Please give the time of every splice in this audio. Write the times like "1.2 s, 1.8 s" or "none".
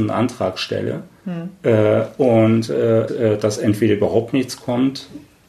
3.1 s